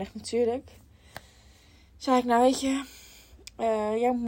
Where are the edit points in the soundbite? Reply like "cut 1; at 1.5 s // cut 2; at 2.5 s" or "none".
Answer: none